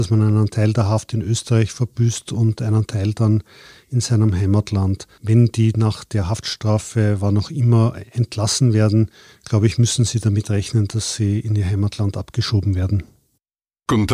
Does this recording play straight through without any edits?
yes; 0 cuts

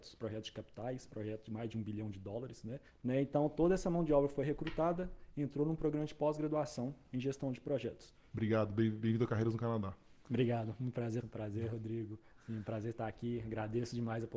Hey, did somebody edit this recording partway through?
yes; 3 cuts; at 2.9 s, 8.3 s, 11.2 s

